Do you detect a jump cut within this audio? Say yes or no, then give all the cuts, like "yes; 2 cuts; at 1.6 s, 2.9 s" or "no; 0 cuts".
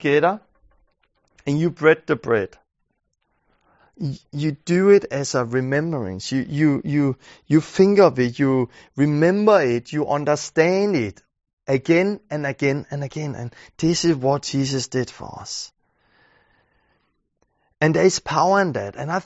no; 0 cuts